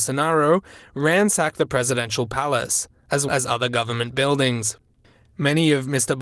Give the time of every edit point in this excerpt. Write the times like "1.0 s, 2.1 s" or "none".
3.3 s